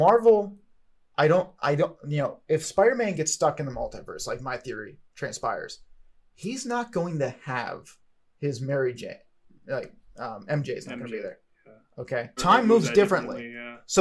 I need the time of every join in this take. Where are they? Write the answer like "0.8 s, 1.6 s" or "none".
12.4 s